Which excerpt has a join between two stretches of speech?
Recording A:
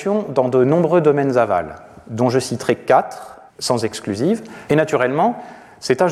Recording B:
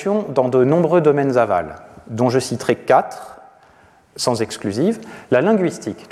A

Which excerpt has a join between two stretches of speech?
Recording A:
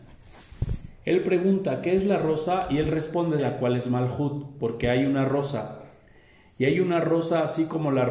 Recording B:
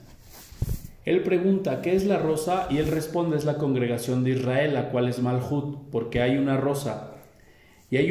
A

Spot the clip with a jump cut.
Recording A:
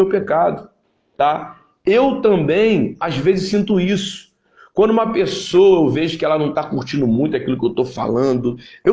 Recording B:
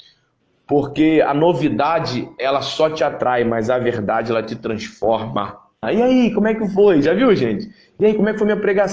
B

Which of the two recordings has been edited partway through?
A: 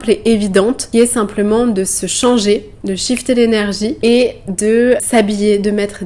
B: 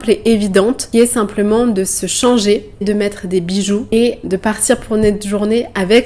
B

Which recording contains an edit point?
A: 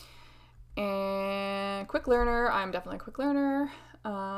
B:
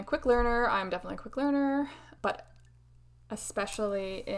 B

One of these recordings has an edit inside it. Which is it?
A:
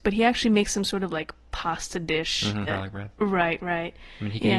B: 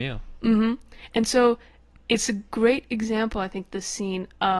A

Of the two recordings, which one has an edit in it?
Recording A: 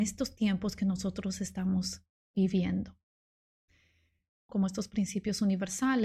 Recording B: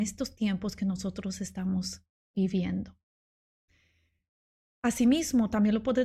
A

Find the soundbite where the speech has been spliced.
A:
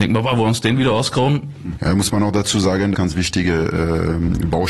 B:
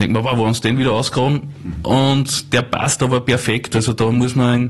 A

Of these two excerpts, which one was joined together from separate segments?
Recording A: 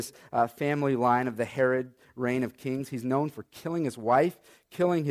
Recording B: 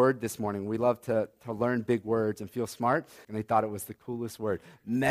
B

